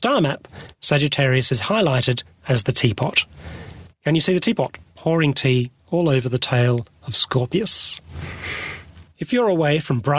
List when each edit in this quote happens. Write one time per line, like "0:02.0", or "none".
0:09.1